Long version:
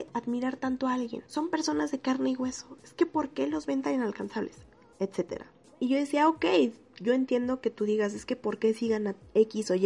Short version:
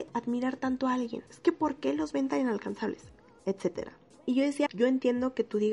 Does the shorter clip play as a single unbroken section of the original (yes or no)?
no